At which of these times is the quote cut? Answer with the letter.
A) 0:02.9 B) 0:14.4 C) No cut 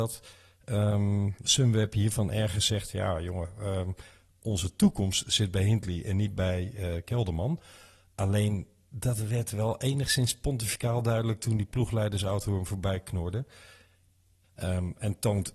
B